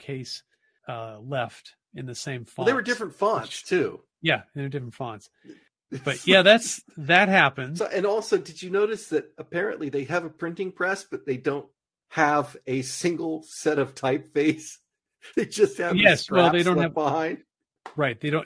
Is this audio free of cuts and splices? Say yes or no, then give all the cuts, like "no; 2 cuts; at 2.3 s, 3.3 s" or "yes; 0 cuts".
no; 2 cuts; at 7.8 s, 15.3 s